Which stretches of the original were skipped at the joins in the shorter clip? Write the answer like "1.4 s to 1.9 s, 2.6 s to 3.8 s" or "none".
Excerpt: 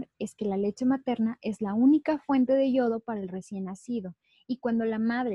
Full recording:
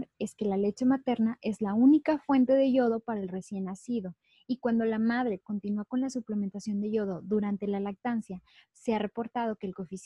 none

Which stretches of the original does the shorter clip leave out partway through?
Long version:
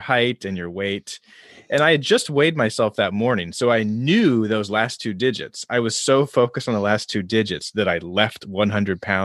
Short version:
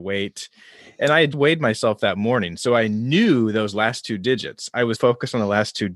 2.0 s to 2.3 s, 5.9 s to 6.3 s

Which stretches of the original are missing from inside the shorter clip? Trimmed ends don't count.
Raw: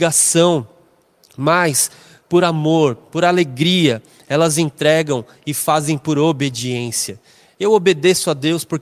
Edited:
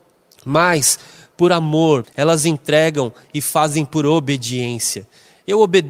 3.0 s to 4.2 s

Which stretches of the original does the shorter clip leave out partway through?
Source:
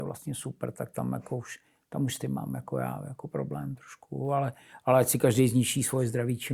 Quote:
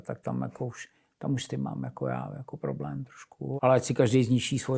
4.3 s to 4.8 s

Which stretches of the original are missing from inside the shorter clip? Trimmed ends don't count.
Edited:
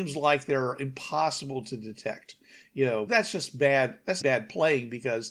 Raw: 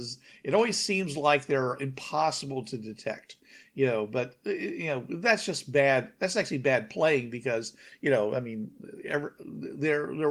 4.1 s to 5.2 s, 6.3 s to 6.6 s

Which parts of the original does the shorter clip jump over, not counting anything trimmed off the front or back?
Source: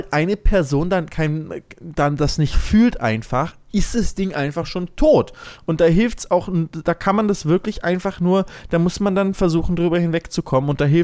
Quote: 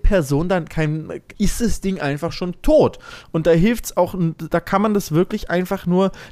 1.8 s to 3.7 s

